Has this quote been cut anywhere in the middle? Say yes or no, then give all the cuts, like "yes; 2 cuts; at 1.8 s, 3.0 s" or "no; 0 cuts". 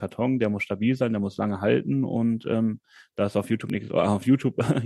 no; 0 cuts